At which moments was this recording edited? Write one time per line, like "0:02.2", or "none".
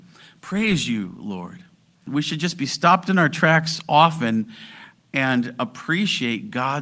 0:02.1